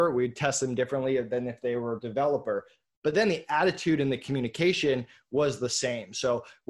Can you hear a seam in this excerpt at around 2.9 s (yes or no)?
no